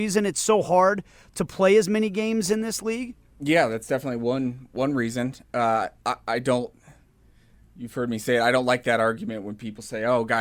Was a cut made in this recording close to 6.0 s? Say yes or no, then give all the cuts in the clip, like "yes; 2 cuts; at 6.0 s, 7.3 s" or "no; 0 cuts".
no; 0 cuts